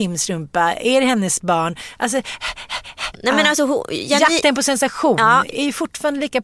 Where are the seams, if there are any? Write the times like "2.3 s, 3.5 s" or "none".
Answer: 3.1 s